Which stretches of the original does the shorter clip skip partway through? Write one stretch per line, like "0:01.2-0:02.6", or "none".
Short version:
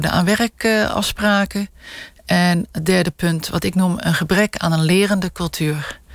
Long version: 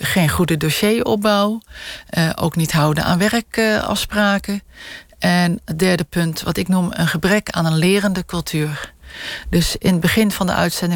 none